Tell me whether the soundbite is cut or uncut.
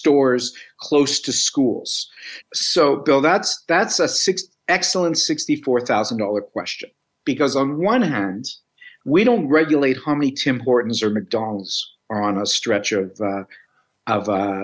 cut